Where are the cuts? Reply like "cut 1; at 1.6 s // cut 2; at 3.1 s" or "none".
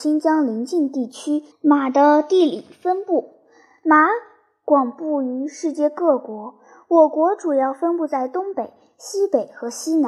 cut 1; at 1.5 s